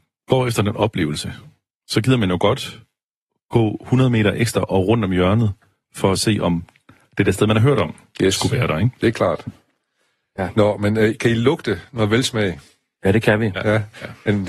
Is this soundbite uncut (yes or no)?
yes